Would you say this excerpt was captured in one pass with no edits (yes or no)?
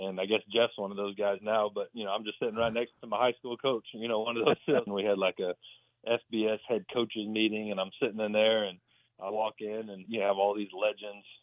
no